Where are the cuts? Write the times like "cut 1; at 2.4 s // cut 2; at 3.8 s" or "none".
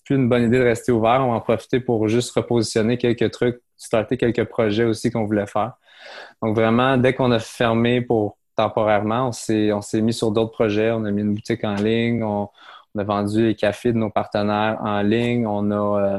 none